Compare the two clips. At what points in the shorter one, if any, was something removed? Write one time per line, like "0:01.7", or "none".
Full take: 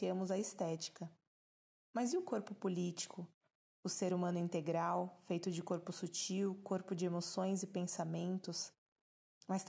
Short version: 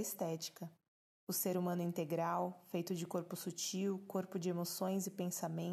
0:01.1